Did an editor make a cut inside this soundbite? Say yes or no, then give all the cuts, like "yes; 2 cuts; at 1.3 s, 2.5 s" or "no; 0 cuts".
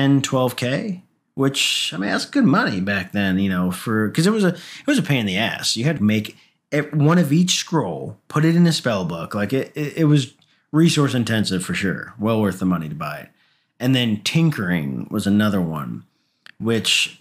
yes; 1 cut; at 6.0 s